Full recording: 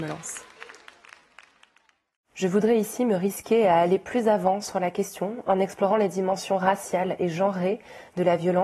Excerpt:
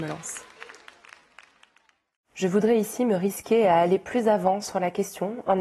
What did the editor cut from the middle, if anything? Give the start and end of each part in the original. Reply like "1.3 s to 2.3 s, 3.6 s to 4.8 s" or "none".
none